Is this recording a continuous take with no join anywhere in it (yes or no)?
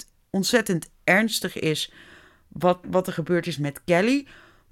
no